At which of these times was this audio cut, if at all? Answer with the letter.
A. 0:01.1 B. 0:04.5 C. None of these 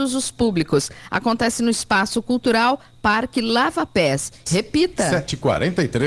B